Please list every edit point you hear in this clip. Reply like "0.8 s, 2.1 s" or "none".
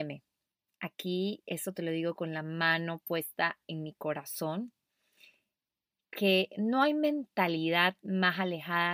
none